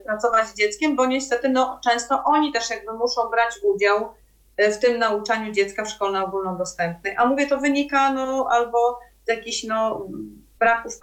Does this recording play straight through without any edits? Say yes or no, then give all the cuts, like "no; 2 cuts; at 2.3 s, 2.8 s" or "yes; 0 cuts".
yes; 0 cuts